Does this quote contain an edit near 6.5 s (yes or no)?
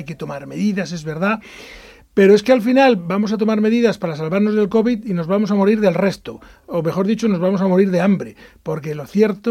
no